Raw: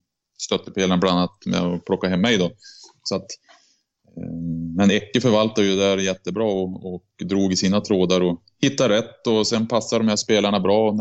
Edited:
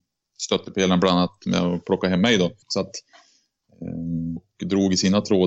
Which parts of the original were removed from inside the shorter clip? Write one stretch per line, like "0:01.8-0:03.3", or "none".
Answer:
0:02.6-0:03.0
0:04.7-0:07.0